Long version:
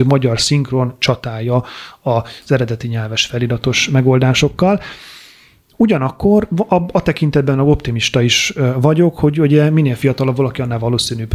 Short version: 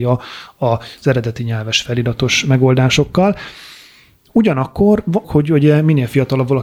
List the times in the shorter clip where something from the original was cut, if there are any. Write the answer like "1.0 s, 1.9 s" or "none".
5.2 s